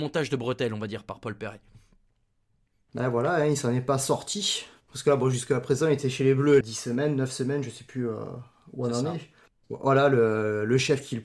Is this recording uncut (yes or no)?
no